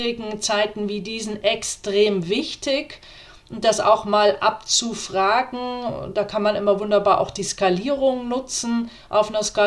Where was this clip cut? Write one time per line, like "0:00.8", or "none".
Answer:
none